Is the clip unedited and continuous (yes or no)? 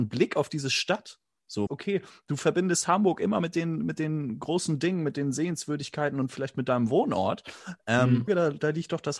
no